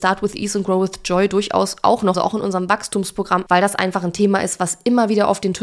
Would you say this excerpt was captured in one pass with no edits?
no; 2 cuts; at 2.1 s, 3.5 s

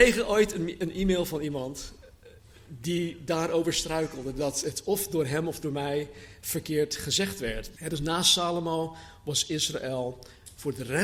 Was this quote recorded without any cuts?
no; 1 cut; at 7.7 s

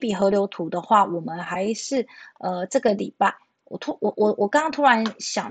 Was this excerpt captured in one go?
yes; 0 cuts

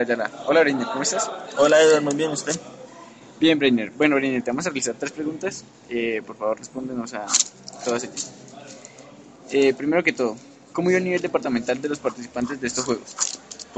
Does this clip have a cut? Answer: no; 0 cuts

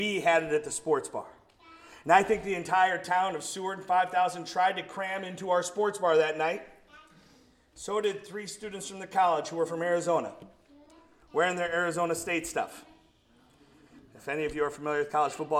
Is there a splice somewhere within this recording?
no; 0 cuts

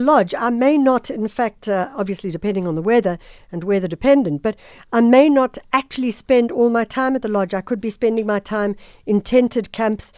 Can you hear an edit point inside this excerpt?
no; 0 cuts

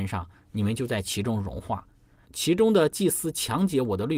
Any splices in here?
yes; 1 cut; at 2.2 s

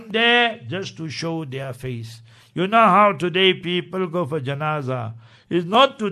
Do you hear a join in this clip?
no; 0 cuts

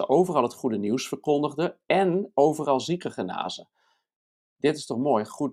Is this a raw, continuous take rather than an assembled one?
yes; 0 cuts

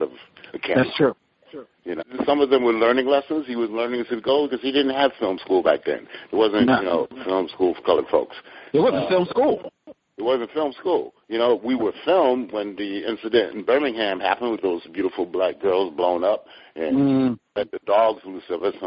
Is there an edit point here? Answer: yes; 2 cuts; at 2.0 s, 6.3 s

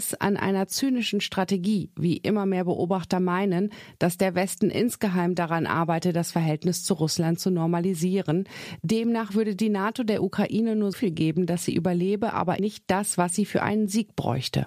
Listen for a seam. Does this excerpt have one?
yes; 2 cuts; at 10.9 s, 12.6 s

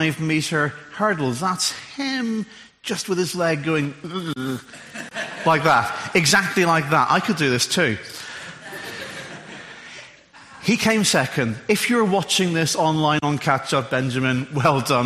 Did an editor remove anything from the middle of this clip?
no; 0 cuts

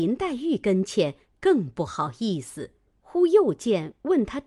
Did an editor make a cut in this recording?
yes; 1 cut; at 2.9 s

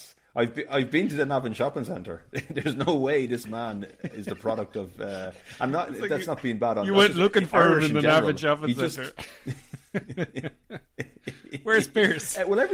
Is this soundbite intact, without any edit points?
yes; 0 cuts

